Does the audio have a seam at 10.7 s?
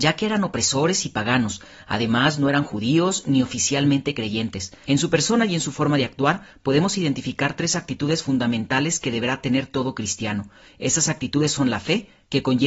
no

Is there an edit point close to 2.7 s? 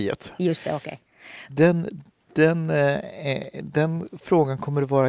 no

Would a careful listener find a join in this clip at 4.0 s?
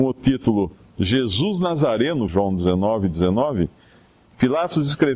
no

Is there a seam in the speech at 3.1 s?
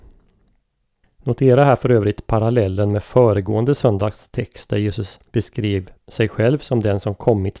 no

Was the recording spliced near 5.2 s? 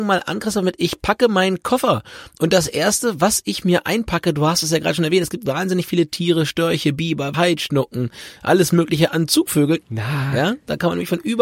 no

